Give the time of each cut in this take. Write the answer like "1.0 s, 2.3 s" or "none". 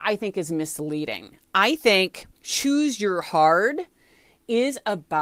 2.3 s